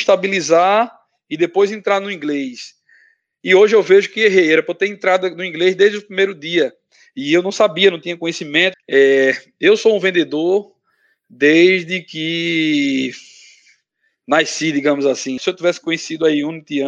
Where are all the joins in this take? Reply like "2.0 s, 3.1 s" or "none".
8.7 s, 15.4 s